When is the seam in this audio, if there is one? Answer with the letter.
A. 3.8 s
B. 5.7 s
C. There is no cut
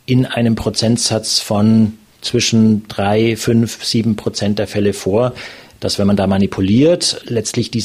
C